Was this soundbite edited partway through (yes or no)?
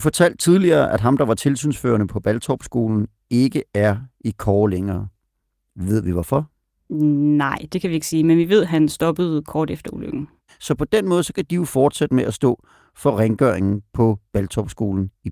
yes